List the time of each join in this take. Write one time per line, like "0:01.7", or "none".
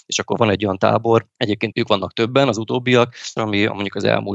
0:01.7
0:03.4